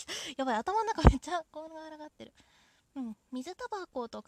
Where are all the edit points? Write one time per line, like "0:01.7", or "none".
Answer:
0:03.3